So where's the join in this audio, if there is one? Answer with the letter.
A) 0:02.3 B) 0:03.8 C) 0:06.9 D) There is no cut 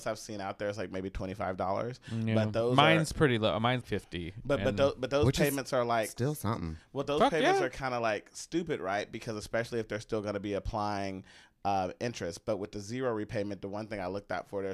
B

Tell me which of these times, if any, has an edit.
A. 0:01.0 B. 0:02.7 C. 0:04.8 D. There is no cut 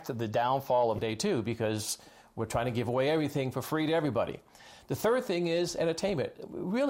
A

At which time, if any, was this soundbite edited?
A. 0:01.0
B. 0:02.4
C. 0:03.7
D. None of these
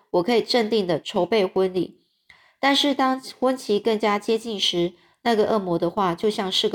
A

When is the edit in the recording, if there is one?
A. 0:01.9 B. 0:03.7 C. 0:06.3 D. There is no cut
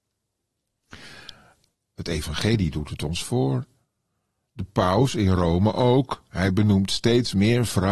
A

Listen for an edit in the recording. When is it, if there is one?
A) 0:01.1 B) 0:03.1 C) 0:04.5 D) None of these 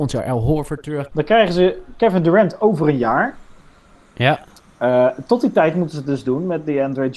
A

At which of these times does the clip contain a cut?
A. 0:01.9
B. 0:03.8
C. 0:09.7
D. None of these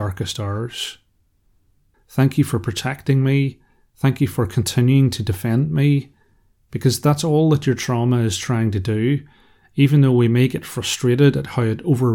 A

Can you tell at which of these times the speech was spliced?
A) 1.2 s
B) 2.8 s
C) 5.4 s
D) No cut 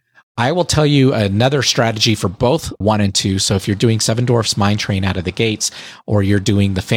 B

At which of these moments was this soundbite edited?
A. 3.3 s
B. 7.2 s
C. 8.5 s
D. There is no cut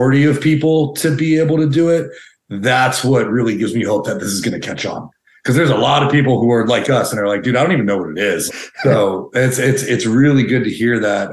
C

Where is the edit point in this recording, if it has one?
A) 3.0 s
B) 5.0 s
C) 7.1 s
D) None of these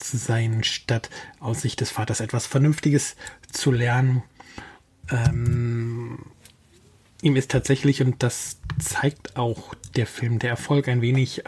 B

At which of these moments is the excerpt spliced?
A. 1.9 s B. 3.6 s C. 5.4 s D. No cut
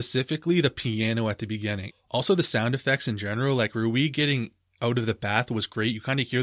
A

